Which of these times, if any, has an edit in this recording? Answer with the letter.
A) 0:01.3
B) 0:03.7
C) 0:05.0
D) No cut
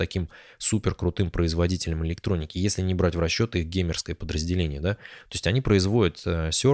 D